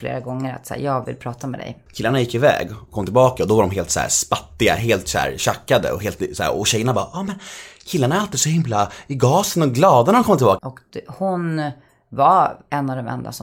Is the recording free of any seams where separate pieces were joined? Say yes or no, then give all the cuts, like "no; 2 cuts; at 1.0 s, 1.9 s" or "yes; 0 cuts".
no; 2 cuts; at 1.9 s, 10.6 s